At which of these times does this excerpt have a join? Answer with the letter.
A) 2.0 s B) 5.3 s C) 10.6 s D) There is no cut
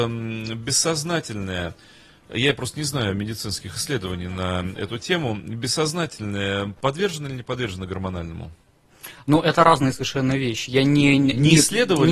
D